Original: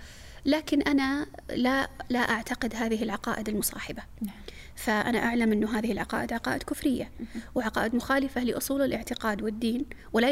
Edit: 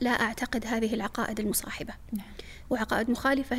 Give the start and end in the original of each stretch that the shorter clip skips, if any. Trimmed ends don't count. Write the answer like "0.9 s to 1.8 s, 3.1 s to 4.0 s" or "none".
4.7 s to 7.5 s